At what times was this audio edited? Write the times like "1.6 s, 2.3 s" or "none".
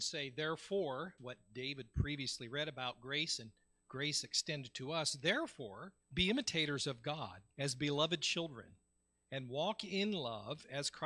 1.2 s, 6.0 s, 7.5 s